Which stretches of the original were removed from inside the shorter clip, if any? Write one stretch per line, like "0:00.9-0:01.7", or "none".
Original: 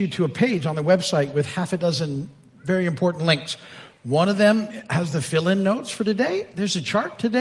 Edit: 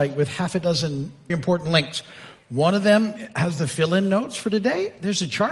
0:02.5-0:02.8